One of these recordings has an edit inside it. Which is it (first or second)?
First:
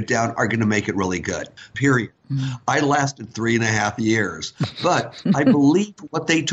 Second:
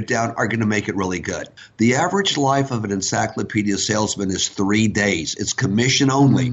first